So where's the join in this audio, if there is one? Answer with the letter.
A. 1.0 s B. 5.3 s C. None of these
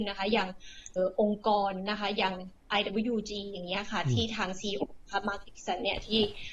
A